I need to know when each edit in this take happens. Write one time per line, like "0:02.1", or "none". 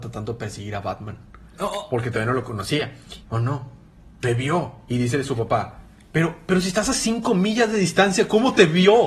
0:03.2